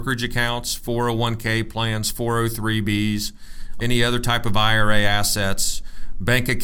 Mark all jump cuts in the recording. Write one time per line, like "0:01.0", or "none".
0:03.8